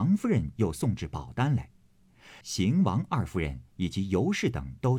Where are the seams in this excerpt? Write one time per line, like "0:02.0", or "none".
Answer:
0:02.4

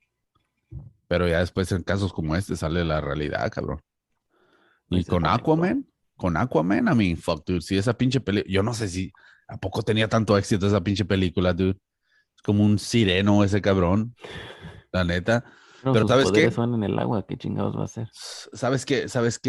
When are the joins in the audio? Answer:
none

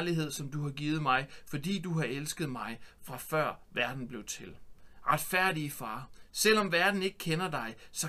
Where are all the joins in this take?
none

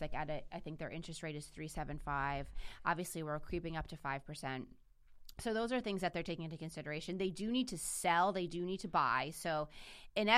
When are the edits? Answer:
none

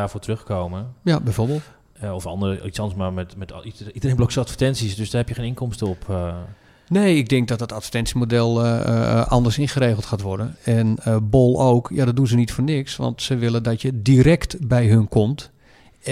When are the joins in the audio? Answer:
0:10.6

